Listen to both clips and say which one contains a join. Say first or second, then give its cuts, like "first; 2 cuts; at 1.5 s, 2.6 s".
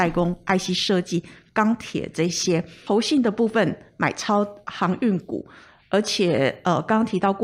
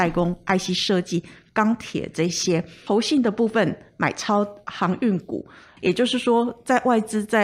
second; 1 cut; at 5.8 s